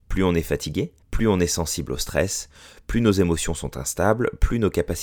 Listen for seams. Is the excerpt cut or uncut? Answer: cut